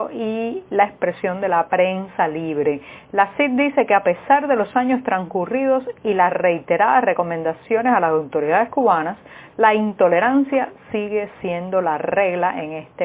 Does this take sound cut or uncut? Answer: uncut